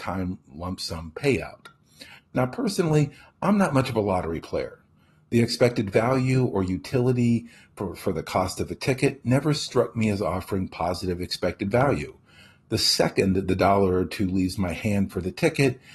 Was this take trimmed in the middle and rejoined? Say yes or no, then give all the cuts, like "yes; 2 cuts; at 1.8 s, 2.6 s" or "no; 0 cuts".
yes; 1 cut; at 2.2 s